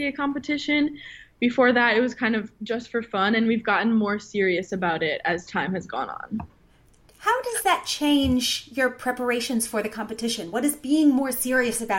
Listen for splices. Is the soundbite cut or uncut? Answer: uncut